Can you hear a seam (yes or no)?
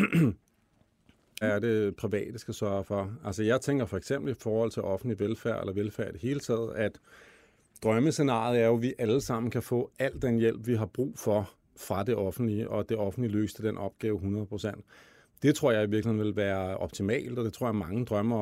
yes